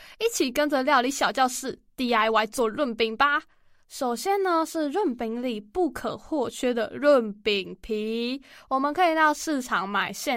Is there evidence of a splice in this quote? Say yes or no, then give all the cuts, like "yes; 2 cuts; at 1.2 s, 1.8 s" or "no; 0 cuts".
no; 0 cuts